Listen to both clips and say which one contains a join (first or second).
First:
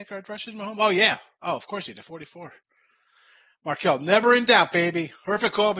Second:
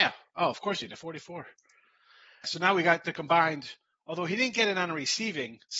second